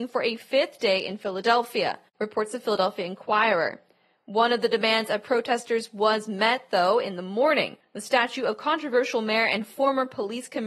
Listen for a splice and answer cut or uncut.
uncut